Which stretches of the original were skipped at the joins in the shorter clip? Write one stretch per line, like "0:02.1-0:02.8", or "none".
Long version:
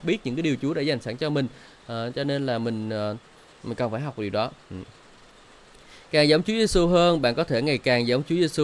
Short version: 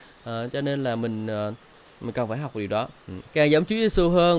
0:04.9-0:06.0